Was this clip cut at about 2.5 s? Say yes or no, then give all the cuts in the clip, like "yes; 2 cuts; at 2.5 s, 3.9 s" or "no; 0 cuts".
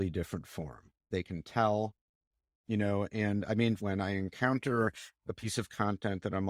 no; 2 cuts; at 1.1 s, 3.8 s